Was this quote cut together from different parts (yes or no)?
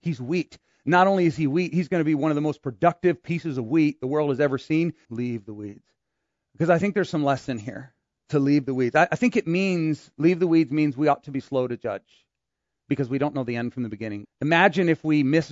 yes